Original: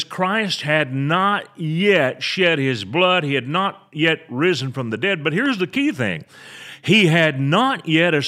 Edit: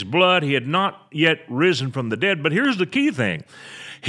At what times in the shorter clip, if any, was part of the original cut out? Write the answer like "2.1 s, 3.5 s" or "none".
none

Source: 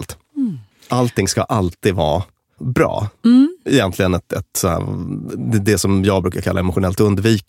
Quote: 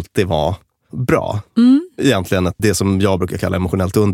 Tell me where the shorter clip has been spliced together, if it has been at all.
2.6 s

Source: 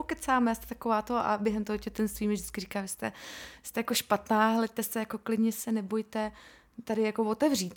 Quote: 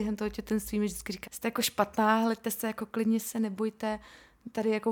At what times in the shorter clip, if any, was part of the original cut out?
1.3 s

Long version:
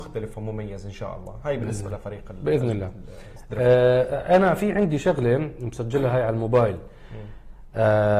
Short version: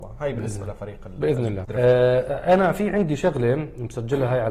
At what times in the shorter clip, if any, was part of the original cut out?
1.6 s

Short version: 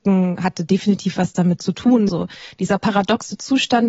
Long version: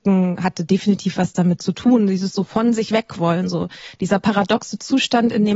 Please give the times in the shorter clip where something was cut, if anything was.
2.1 s

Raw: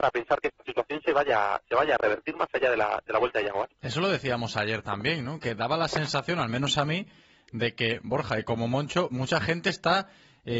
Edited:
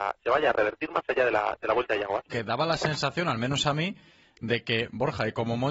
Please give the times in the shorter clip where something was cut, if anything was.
2.3 s

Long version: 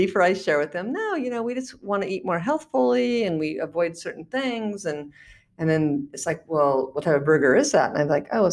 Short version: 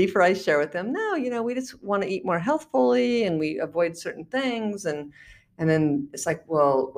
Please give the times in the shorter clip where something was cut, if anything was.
none

